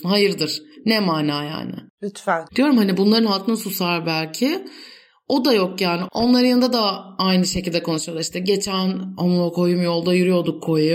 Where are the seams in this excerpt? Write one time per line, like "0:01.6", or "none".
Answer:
0:02.5